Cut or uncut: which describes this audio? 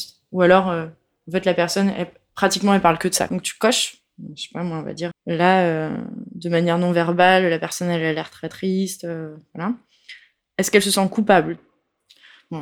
cut